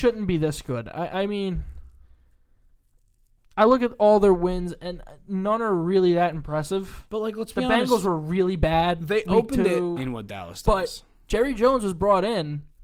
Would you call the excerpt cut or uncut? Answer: cut